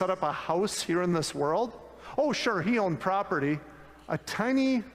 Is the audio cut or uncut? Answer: uncut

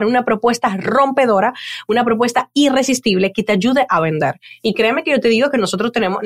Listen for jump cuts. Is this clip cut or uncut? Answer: uncut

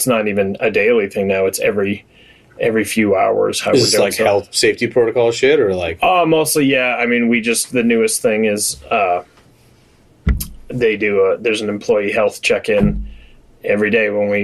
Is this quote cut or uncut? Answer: uncut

